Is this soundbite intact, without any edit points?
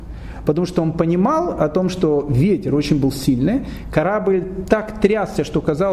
yes; 0 cuts

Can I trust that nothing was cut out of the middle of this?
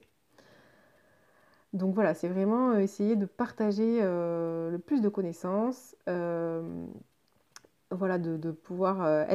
yes; 0 cuts

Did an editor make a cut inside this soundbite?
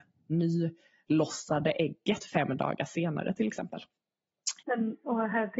yes; 1 cut; at 4.6 s

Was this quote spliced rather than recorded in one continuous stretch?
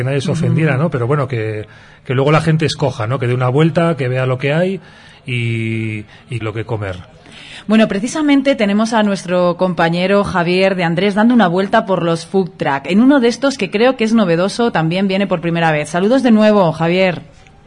yes; 1 cut; at 6.4 s

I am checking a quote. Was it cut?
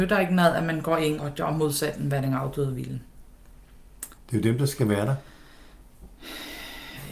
yes; 2 cuts; at 1.2 s, 4.2 s

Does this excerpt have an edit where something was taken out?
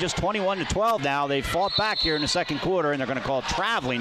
no; 0 cuts

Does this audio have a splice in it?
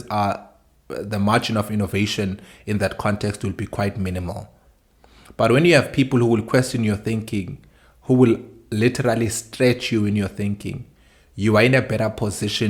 no; 0 cuts

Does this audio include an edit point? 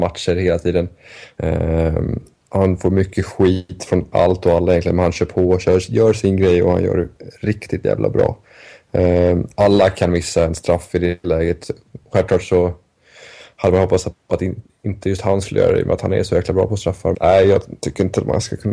yes; 1 cut; at 17.1 s

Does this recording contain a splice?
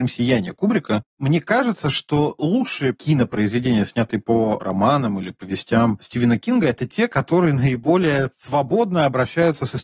no; 0 cuts

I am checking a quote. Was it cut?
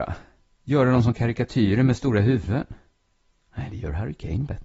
no; 0 cuts

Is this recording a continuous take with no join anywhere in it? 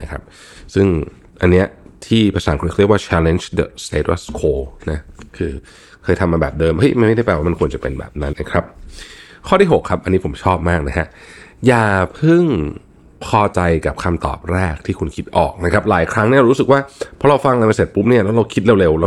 no; 1 cut; at 8.3 s

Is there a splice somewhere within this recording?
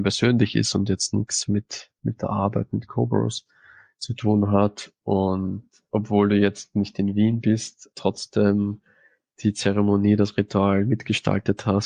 yes; 2 cuts; at 5.0 s, 7.9 s

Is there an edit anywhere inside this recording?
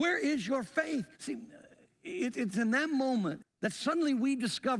yes; 2 cuts; at 1.1 s, 3.4 s

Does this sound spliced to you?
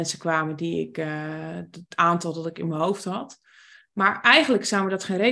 no; 0 cuts

